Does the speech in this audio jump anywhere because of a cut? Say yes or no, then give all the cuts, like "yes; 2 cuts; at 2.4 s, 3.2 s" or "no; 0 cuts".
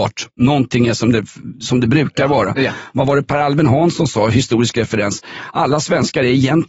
no; 0 cuts